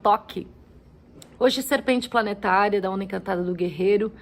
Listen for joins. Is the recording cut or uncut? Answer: cut